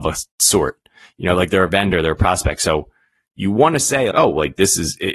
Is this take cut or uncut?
cut